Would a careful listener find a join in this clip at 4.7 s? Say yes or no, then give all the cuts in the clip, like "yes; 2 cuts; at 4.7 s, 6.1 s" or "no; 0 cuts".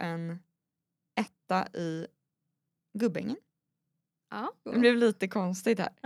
yes; 2 cuts; at 2.8 s, 4.7 s